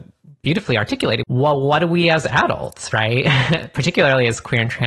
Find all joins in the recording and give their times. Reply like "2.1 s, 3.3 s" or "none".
1.2 s

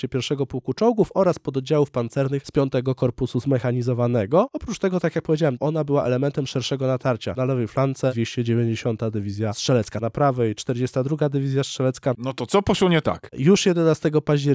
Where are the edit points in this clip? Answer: 12.1 s, 13.3 s

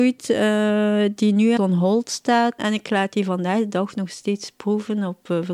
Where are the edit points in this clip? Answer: 1.6 s, 2.6 s

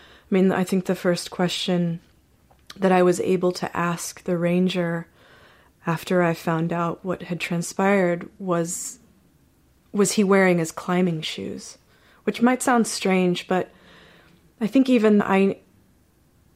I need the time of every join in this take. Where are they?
15.2 s

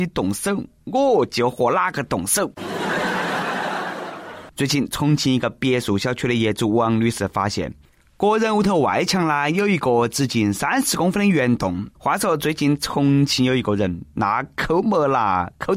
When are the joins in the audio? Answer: 4.5 s, 11.9 s

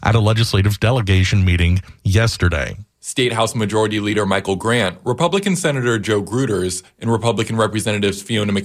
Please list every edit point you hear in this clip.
2.9 s

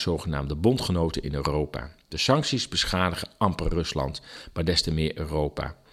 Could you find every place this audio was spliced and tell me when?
none

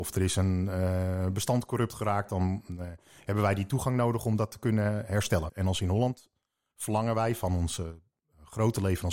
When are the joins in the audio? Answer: 5.5 s

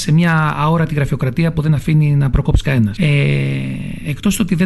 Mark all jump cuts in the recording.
3.0 s

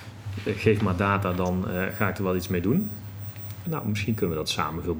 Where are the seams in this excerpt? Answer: 3.6 s

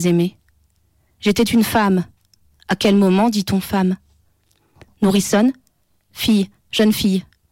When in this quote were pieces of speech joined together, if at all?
2.5 s

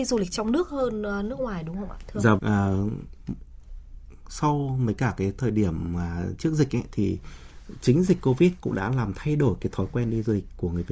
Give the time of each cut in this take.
2.4 s

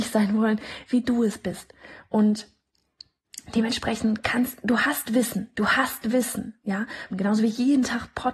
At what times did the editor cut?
7.1 s

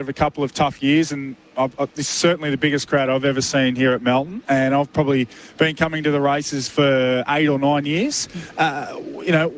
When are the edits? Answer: none

